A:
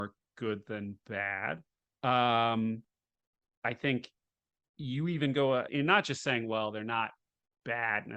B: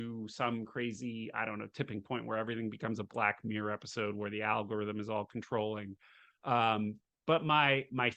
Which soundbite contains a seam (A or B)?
A